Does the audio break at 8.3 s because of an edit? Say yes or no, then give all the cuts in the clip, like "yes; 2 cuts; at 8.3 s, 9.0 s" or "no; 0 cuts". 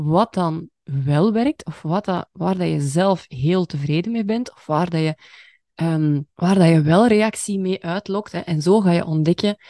no; 1 cut; at 6.3 s